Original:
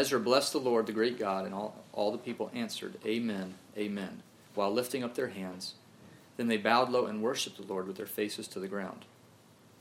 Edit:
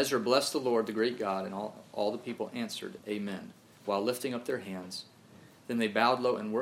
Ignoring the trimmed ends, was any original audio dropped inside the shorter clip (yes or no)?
yes